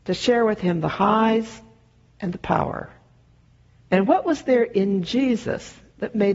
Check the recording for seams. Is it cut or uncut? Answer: cut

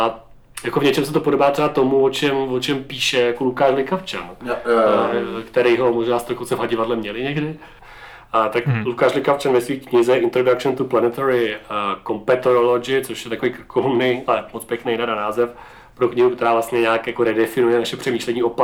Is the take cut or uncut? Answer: uncut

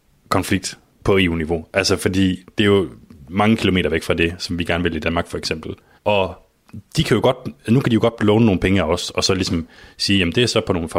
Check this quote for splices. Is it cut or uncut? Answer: cut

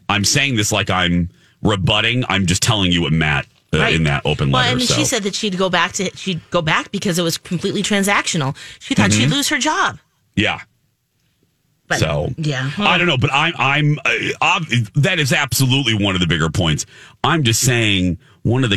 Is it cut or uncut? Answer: uncut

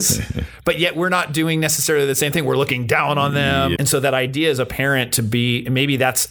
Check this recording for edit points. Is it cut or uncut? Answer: cut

